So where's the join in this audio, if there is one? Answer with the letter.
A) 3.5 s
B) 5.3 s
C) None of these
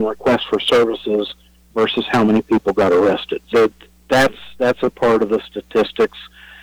A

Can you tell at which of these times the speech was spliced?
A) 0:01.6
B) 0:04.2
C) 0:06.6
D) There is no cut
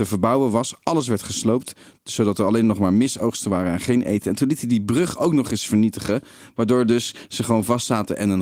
D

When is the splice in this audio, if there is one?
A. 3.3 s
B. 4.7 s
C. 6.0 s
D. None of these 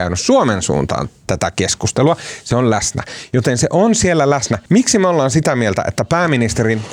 B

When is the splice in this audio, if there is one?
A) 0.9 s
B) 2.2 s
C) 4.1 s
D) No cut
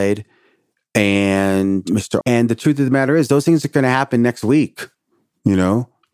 B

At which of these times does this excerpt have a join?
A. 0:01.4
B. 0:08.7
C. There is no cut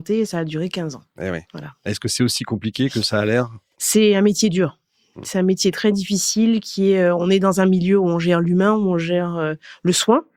A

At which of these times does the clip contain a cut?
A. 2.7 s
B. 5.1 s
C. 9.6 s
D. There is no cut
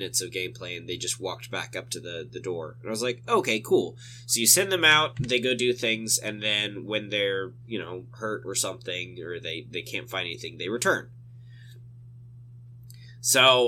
D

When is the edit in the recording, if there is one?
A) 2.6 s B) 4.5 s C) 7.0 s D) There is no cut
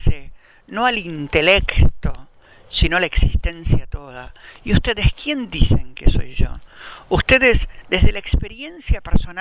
D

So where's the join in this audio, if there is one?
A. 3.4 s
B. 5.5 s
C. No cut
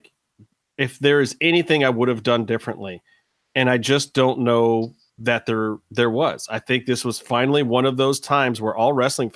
C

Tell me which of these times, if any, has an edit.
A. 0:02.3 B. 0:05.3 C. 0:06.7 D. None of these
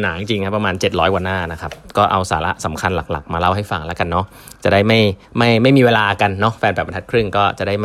B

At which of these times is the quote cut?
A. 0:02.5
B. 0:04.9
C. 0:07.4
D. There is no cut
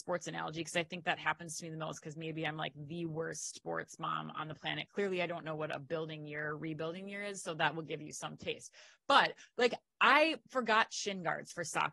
D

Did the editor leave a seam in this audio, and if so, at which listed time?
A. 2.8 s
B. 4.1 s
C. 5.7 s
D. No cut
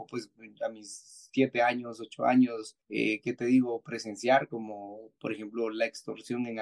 A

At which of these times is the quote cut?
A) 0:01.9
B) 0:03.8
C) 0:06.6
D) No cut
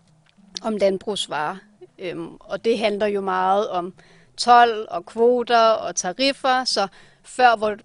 A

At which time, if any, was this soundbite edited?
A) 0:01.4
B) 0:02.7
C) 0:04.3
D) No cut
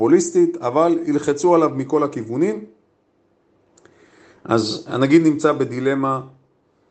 D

